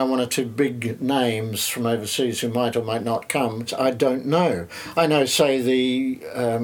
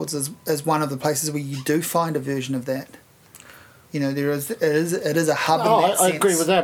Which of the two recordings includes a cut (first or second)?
first